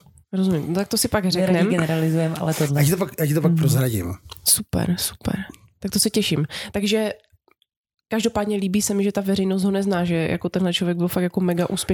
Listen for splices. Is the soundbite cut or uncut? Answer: uncut